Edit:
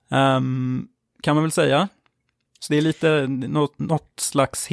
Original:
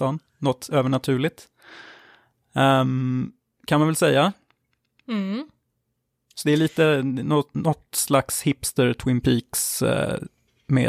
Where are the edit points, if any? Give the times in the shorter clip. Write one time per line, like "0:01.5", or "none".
0:02.5